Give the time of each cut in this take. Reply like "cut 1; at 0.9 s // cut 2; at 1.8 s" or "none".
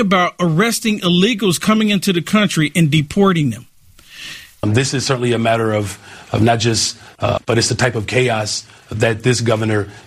cut 1; at 4.6 s // cut 2; at 7.4 s